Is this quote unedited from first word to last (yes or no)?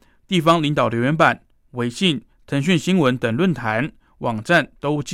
no